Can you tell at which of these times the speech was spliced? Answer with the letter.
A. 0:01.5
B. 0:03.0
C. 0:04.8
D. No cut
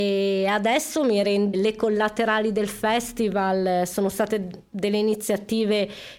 A